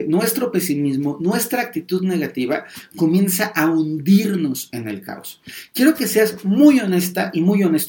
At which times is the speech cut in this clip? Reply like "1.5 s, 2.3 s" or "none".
none